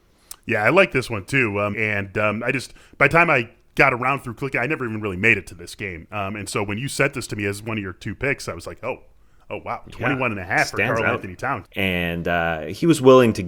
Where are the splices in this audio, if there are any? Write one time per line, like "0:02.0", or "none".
0:01.7
0:11.6